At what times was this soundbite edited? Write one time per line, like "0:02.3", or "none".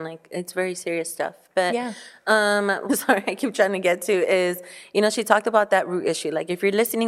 0:02.9

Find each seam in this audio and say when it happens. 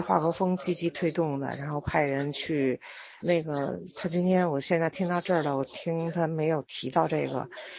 0:03.2

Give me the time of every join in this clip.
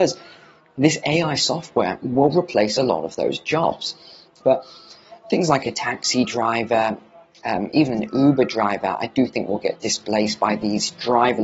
0:04.4

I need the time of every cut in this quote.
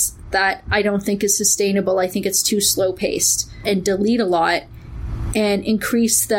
0:03.6

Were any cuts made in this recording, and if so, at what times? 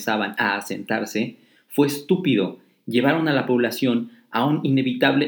none

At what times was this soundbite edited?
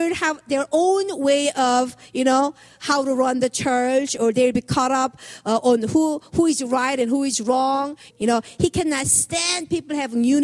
0:08.1

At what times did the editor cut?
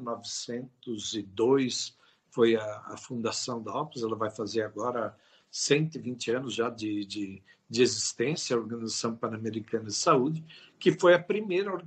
none

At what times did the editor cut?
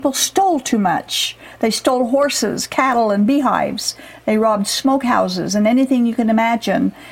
none

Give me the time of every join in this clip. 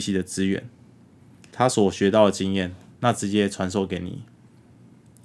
0:01.5

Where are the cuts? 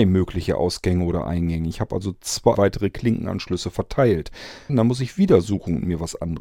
0:02.5
0:04.7

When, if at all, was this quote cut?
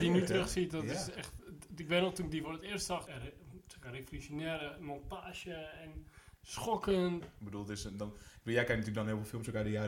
0:03.1
0:07.2

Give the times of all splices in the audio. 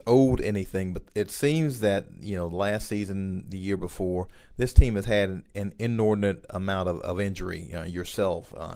none

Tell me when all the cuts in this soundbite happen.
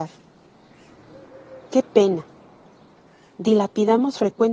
0:01.7

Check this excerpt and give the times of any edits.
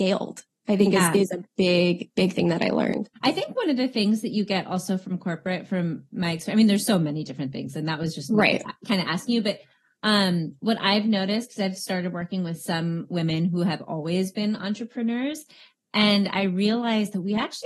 0:03.2

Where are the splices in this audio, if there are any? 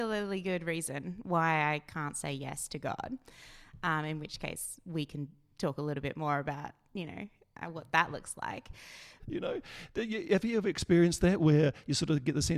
0:09.2

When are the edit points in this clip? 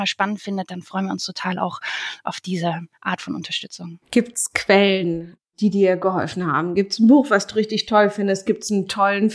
0:04.0

